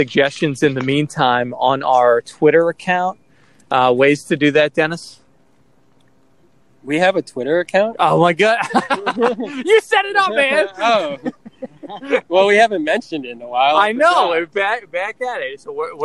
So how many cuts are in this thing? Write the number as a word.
zero